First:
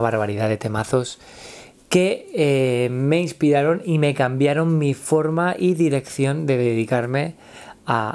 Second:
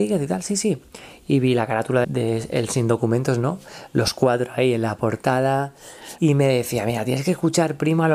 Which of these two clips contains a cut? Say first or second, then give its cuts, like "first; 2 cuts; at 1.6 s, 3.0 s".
second; 2 cuts; at 2.0 s, 6.2 s